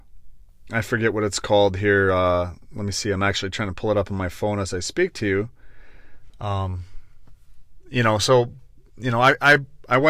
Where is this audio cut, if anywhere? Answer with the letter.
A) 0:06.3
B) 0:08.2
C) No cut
A